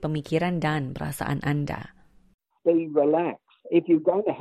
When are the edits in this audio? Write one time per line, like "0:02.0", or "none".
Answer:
0:02.5

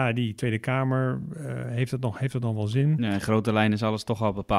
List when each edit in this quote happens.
none

